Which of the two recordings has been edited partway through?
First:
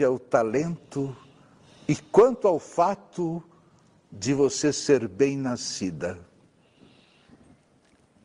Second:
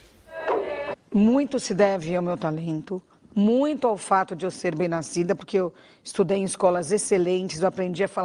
second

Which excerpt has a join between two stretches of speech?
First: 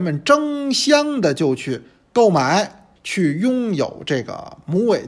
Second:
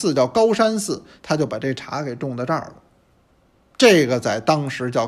first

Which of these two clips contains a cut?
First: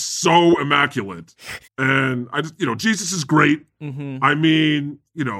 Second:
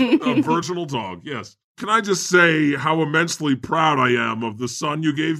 first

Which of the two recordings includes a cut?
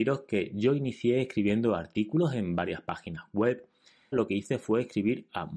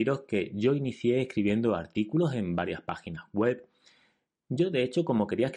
first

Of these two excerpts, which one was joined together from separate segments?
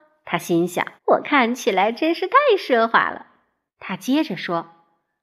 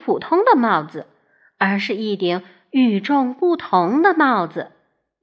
first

